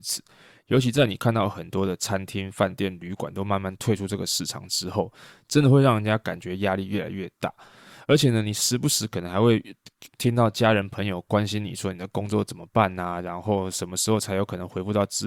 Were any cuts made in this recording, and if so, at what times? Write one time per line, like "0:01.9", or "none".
none